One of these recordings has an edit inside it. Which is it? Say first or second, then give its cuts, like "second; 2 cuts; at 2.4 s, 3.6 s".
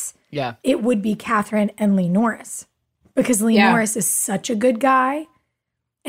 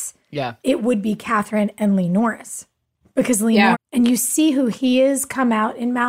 second; 1 cut; at 3.7 s